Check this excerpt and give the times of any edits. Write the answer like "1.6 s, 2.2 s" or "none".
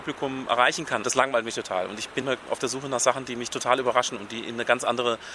1.0 s, 2.2 s